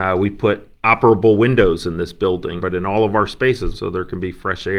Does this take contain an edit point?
yes; 2 cuts; at 2.6 s, 3.7 s

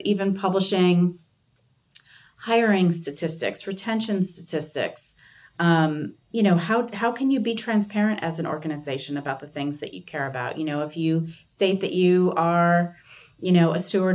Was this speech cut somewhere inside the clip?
no; 0 cuts

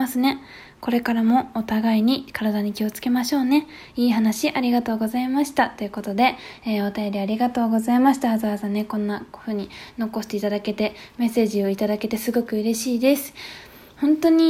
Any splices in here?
no; 0 cuts

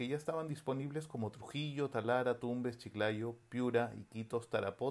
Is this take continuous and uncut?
yes; 0 cuts

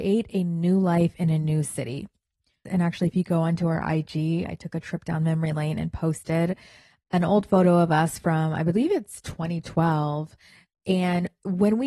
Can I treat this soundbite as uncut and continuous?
no; 1 cut; at 2.7 s

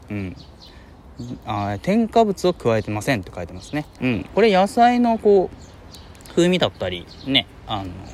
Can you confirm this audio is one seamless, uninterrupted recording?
no; 1 cut; at 4.0 s

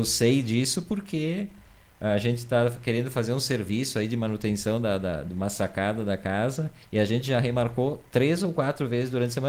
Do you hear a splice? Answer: no; 0 cuts

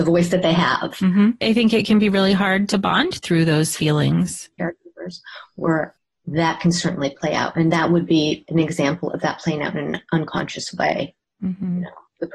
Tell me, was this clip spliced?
yes; 2 cuts; at 1.4 s, 4.6 s

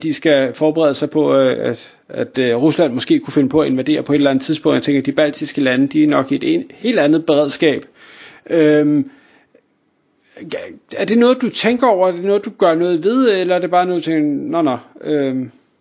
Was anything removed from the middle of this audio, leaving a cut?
no; 0 cuts

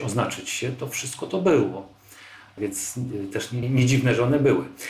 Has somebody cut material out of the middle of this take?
yes; 2 cuts; at 2.6 s, 3.6 s

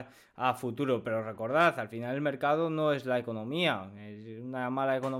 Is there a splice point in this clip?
no; 0 cuts

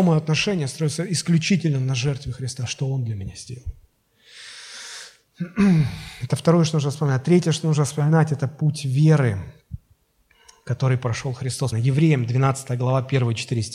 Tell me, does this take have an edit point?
yes; 1 cut; at 11.7 s

